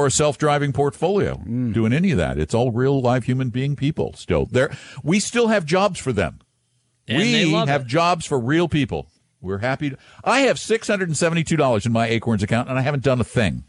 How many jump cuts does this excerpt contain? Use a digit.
0